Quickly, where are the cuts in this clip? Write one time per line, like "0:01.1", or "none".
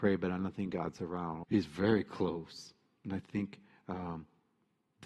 0:01.4